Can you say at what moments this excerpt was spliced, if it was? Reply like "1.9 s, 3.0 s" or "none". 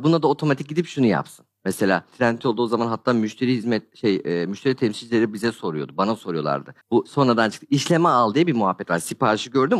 6.8 s